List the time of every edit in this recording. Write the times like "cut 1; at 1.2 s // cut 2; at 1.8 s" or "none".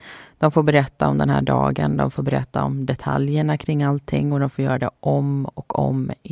none